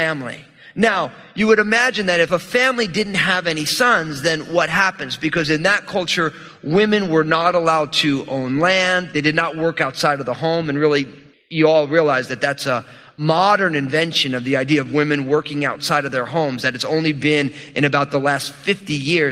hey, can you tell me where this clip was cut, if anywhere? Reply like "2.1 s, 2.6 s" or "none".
none